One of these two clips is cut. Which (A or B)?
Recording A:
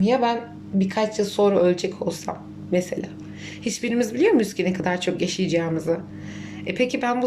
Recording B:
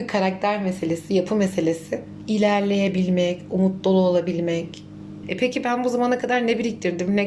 B